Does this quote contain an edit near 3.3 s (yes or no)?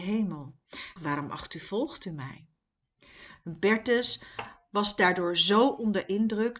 no